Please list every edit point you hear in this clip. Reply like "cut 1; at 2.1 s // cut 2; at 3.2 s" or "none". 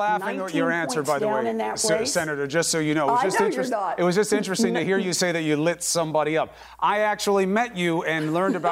none